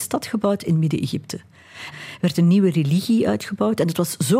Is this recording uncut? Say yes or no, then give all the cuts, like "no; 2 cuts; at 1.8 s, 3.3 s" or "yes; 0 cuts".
no; 1 cut; at 1.9 s